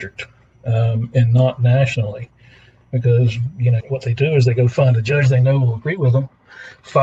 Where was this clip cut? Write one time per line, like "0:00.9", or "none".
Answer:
0:03.8